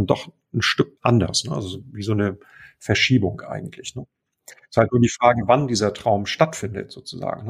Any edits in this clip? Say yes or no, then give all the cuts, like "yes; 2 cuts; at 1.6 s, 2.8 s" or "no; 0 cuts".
yes; 1 cut; at 1.0 s